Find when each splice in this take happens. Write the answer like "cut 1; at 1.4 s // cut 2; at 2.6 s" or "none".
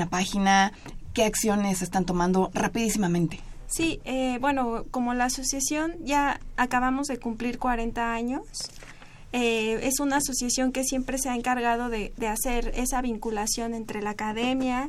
none